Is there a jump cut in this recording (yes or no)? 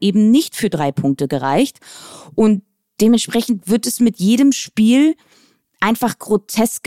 no